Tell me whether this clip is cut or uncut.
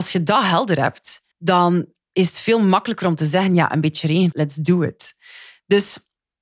cut